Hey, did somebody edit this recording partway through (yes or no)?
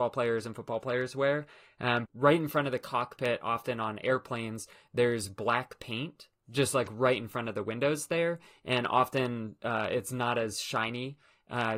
yes